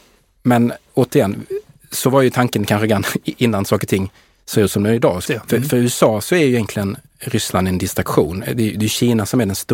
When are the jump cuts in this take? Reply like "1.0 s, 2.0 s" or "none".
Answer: 5.3 s

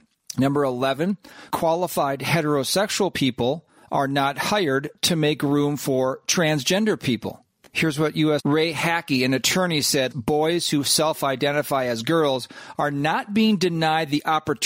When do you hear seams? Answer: 8.4 s, 10.1 s

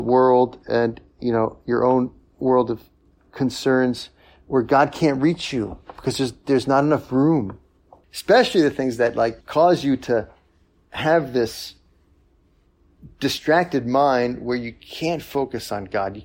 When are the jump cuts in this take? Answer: 8.0 s, 9.4 s

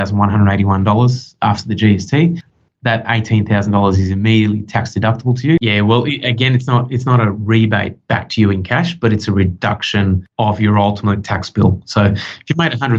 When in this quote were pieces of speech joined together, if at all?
5.6 s

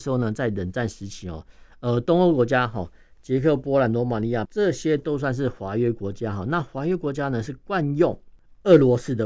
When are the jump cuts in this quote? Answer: 4.5 s

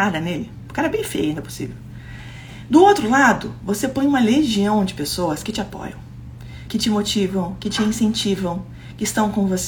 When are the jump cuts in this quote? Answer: 6.7 s

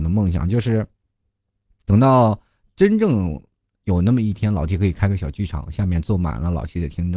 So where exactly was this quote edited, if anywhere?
none

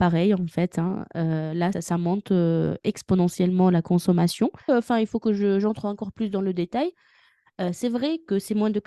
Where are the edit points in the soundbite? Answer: 1.7 s, 4.7 s

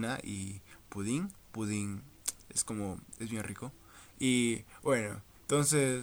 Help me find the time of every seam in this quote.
4.1 s

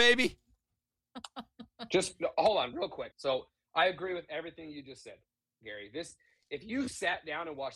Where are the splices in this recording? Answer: 3.1 s

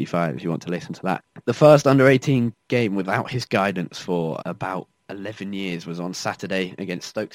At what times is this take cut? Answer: 4.4 s

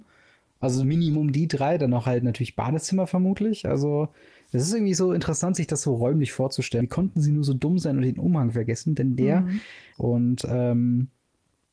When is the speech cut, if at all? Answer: 6.8 s, 9.9 s

